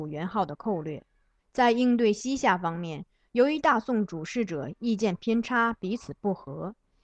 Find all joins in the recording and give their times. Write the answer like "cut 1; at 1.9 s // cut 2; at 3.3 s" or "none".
cut 1; at 1.4 s